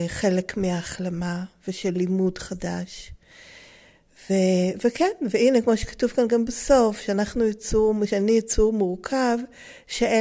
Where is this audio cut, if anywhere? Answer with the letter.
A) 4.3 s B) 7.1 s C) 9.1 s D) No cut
D